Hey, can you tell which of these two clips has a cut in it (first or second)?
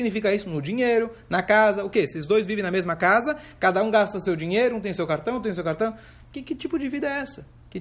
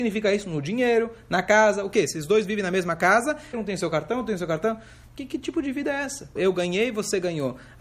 second